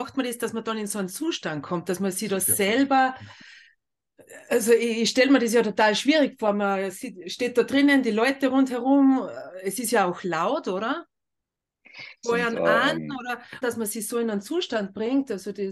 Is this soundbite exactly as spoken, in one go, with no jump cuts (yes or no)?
no